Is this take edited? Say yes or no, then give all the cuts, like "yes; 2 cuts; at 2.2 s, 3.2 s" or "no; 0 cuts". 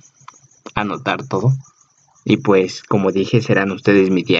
yes; 1 cut; at 2.1 s